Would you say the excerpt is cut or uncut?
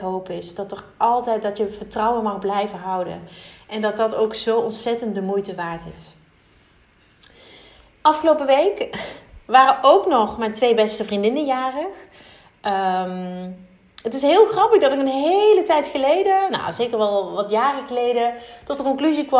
uncut